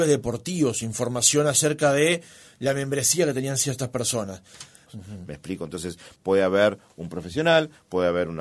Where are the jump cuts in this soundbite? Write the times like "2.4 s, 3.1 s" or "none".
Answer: 4.9 s, 6.2 s